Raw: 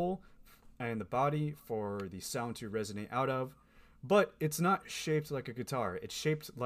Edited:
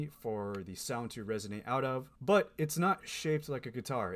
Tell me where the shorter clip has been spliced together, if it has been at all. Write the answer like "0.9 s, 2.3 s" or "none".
2.2 s